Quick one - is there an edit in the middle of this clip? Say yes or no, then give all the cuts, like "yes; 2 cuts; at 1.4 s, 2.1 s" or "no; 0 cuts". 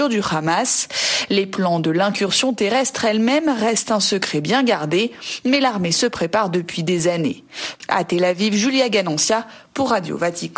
no; 0 cuts